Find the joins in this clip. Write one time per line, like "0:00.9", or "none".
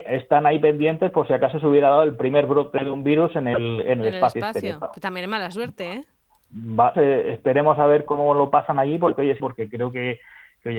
0:06.9
0:08.1
0:09.4